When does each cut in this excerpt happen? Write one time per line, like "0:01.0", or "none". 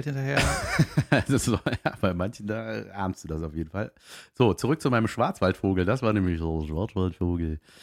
none